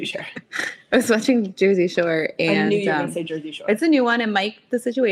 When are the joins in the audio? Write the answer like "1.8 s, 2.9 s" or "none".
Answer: none

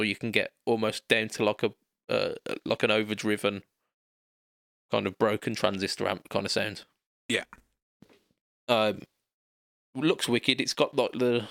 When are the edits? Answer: none

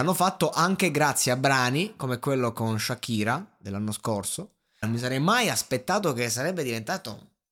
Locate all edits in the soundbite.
4.8 s

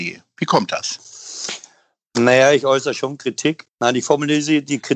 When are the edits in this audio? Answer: 3.6 s

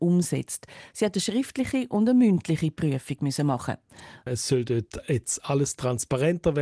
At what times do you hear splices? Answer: 0.9 s, 4.3 s

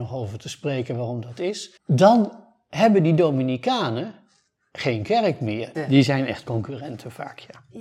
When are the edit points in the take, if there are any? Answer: 1.8 s, 5.7 s

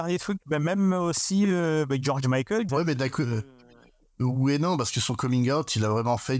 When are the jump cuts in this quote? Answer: 2.7 s

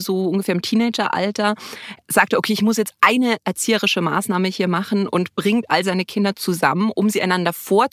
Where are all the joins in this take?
none

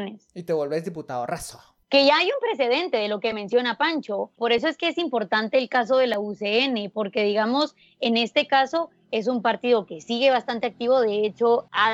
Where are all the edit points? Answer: 1.8 s

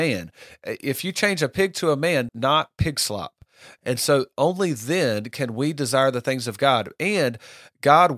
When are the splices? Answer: 2.3 s, 3.8 s

